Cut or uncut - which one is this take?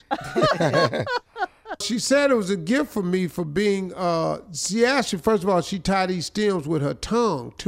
cut